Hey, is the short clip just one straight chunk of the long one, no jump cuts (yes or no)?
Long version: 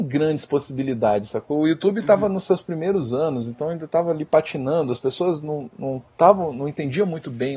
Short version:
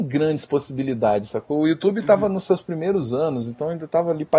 yes